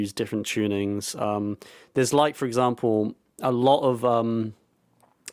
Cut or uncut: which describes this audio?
uncut